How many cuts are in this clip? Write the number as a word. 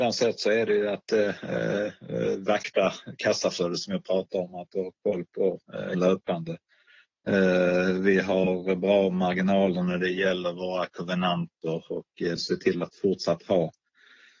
two